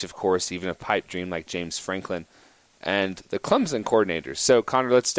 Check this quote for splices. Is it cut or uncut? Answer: uncut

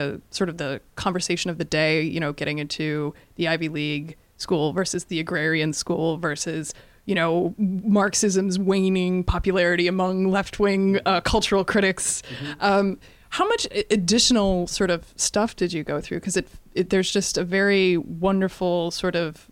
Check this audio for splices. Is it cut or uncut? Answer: uncut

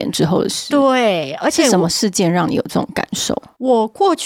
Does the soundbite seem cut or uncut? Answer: uncut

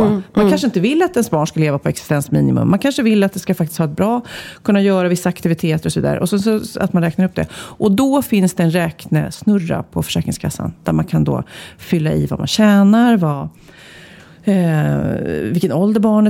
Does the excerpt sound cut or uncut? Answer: uncut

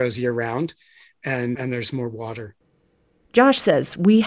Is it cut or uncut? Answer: cut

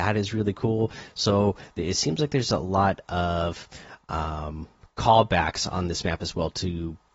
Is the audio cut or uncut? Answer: uncut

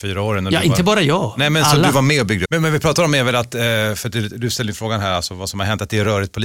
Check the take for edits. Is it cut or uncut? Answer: cut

